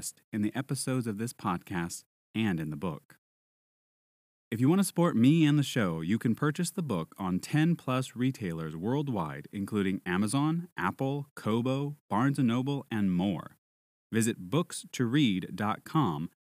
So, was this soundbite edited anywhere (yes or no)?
no